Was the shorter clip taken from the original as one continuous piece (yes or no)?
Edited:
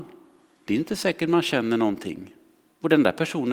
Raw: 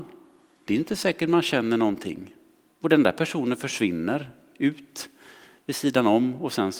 yes